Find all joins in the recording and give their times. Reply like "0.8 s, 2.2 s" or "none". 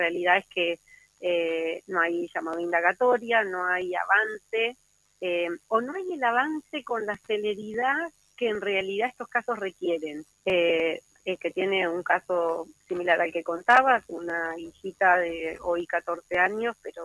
10.3 s